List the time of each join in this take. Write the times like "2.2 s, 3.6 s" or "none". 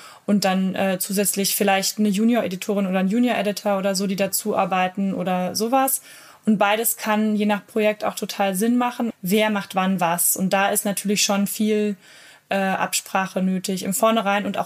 9.1 s